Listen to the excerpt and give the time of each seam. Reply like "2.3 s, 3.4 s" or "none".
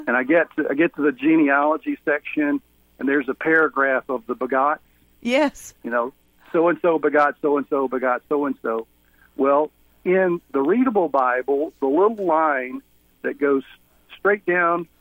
none